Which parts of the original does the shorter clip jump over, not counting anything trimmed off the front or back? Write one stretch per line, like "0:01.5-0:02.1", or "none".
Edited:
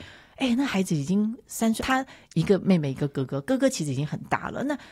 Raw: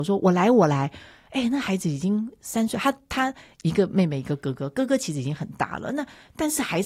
0:02.7-0:03.1

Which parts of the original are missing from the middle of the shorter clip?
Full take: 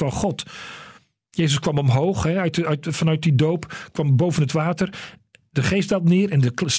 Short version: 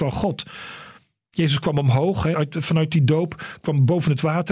0:02.3-0:02.6

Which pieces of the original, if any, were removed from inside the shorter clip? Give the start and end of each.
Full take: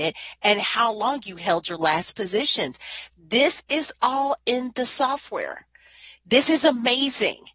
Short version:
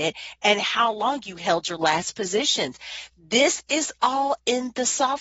none

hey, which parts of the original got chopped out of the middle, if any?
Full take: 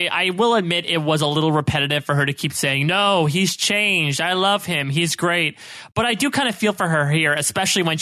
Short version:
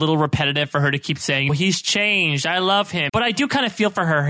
0:02.8-0:03.2
0:04.8-0:05.9

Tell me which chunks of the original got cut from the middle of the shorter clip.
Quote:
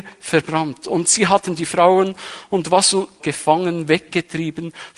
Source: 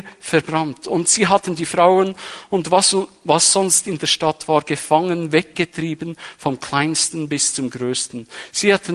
0:03.2-0:04.6

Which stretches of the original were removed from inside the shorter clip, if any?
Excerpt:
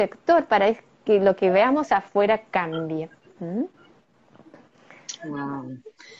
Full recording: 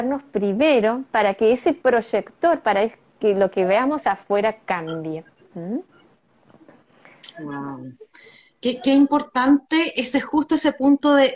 none

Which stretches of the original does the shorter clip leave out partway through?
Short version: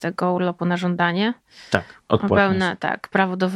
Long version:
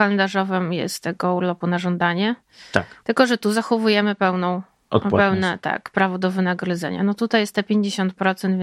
0:03.0-0:04.8

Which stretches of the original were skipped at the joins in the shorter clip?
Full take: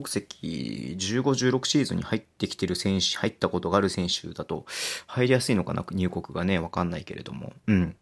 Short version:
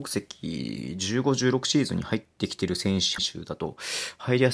0:03.2-0:04.1

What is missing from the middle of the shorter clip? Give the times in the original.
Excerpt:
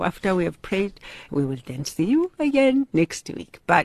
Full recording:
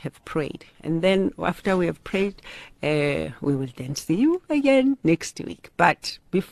0:02.7-0:03.4

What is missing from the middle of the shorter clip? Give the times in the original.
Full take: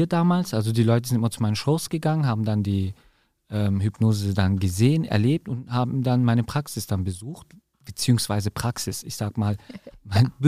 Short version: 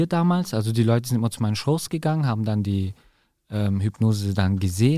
none

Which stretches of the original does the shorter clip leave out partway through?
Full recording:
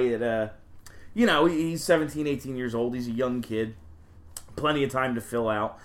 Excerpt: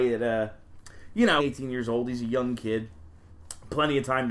0:01.4-0:02.2

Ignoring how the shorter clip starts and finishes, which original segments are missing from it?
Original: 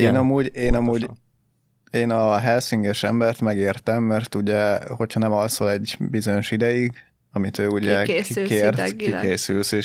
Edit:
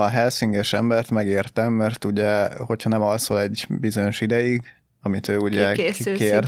none

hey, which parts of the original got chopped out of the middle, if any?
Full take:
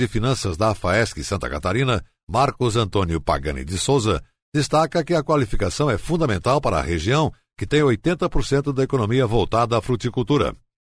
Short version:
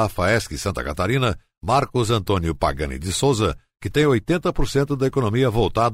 0:04.4-0:07.5

